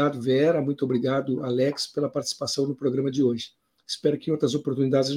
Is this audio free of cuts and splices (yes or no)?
yes